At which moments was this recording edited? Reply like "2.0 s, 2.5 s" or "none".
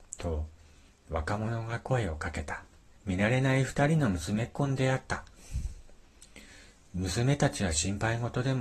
3.0 s

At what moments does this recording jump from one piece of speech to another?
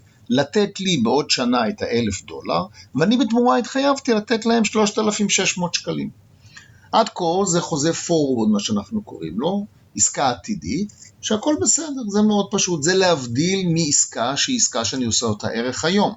none

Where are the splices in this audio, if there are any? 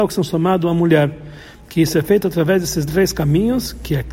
none

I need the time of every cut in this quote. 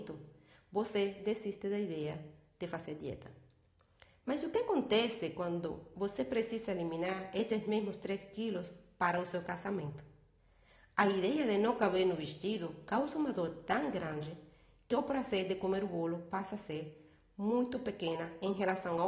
none

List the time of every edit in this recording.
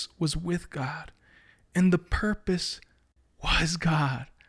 none

